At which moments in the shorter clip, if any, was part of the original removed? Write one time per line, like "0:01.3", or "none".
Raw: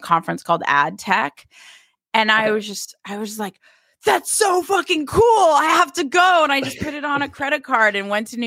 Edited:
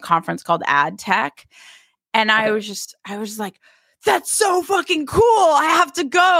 none